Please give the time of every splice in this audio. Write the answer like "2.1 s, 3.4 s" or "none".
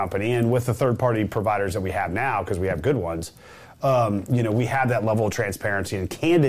none